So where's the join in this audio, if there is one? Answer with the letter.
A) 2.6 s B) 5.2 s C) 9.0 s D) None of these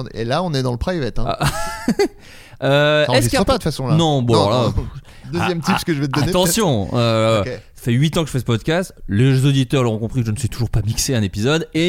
B